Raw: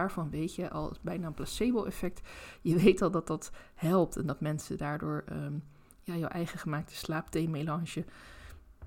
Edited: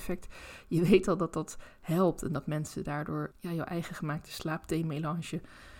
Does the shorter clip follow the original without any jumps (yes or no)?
no